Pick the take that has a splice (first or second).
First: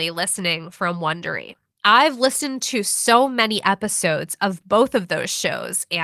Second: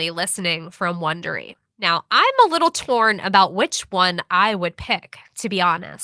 first